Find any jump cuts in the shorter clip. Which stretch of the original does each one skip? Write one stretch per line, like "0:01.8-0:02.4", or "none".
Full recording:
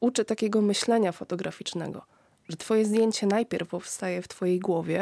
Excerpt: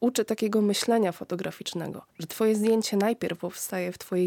0:02.1-0:02.4